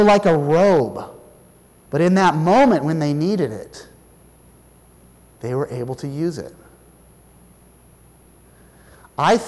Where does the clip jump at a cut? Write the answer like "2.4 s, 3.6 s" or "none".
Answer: 1.8 s